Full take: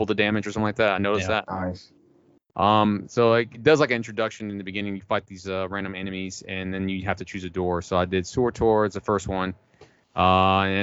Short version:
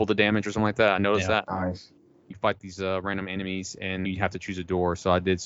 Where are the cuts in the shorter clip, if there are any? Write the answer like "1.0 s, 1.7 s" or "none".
2.3 s, 4.1 s